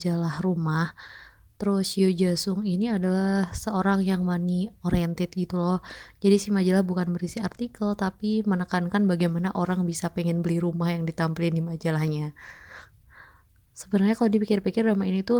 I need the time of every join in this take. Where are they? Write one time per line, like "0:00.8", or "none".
0:13.7